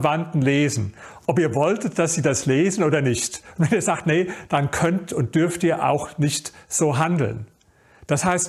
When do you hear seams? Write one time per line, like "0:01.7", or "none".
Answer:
0:04.5